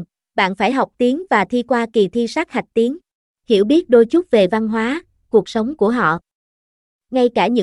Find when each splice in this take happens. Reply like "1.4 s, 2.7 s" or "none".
3.3 s